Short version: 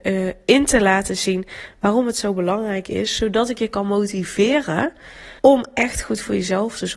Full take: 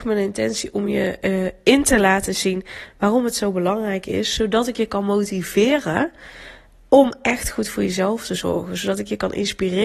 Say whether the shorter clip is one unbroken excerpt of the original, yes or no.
no